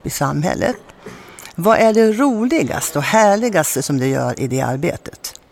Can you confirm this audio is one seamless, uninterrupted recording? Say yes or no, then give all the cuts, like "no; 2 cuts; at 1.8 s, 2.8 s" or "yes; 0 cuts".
yes; 0 cuts